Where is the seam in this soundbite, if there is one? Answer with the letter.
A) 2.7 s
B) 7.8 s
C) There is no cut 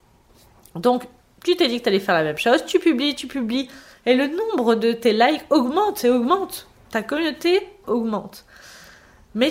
B